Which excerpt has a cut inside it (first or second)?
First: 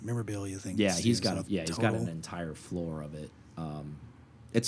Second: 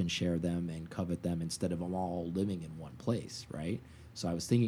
first